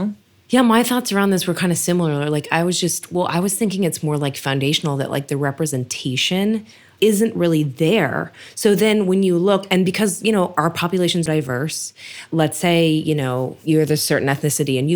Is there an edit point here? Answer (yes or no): yes